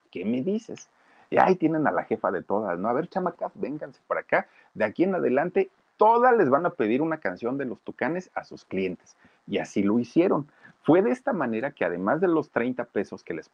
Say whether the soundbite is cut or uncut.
uncut